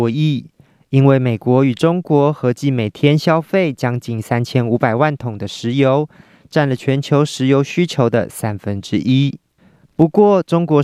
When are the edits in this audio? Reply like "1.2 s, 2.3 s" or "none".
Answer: none